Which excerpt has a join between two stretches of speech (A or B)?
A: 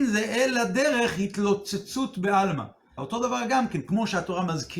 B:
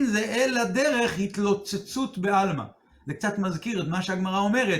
A